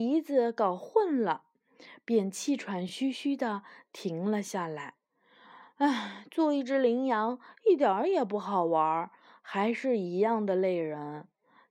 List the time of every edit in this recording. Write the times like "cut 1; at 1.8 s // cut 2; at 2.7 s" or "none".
none

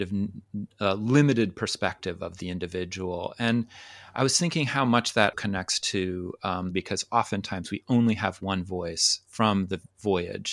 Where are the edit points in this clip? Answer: cut 1; at 5.3 s // cut 2; at 6.7 s

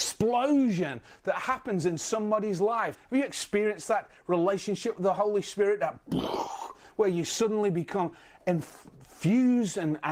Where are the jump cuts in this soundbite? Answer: cut 1; at 2.9 s

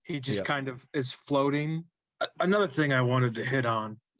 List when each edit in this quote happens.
cut 1; at 2.0 s

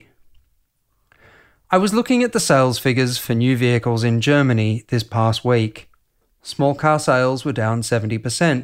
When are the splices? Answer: cut 1; at 6.2 s

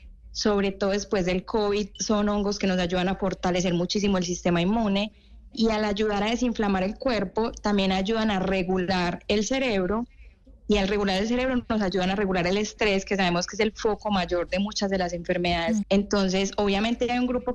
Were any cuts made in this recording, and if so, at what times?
cut 1; at 15.8 s

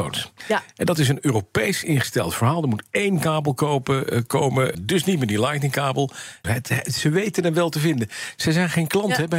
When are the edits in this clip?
cut 1; at 4.7 s // cut 2; at 6.4 s

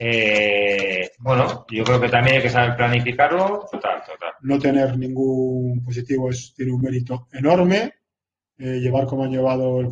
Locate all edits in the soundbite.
cut 1; at 3.7 s

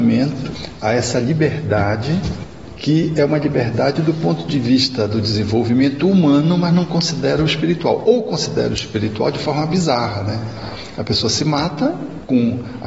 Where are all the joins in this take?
none

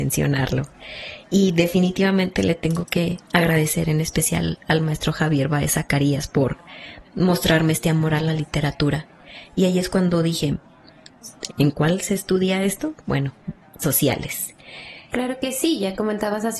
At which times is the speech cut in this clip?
cut 1; at 11.5 s // cut 2; at 15.1 s

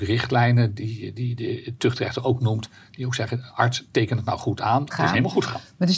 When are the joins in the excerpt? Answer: cut 1; at 4.9 s

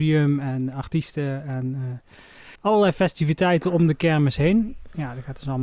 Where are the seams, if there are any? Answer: cut 1; at 2.6 s

